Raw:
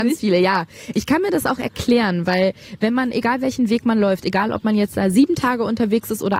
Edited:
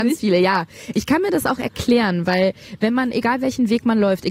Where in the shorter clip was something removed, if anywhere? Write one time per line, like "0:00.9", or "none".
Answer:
none

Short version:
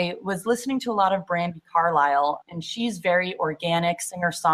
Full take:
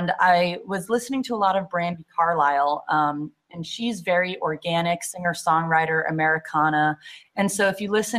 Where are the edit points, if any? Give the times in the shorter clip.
0:02.4

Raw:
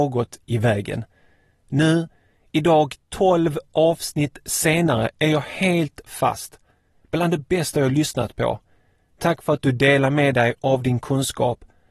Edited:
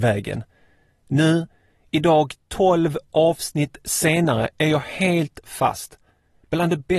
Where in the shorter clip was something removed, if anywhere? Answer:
none

